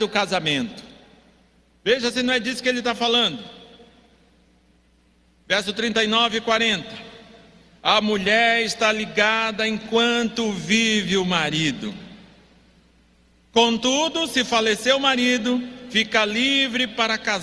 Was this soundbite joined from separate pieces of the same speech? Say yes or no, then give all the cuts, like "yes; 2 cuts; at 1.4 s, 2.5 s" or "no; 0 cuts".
no; 0 cuts